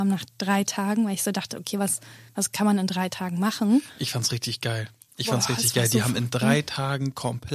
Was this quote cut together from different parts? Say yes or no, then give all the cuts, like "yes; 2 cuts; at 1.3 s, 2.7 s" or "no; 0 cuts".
no; 0 cuts